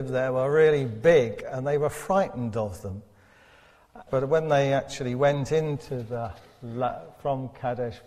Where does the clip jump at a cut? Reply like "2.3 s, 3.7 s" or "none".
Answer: 4.1 s